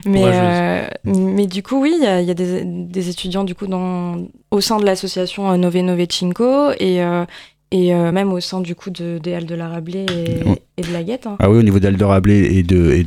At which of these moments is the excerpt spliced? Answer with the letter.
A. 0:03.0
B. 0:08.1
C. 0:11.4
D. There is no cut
D